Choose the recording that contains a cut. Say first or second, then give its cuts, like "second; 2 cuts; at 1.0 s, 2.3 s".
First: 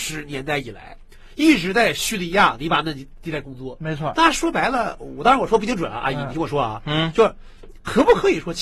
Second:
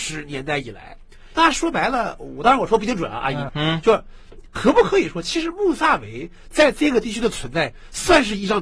second; 2 cuts; at 1.3 s, 3.5 s